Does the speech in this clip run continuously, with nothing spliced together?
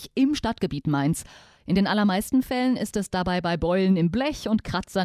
yes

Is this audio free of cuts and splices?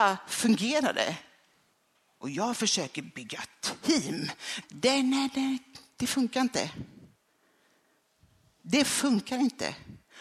no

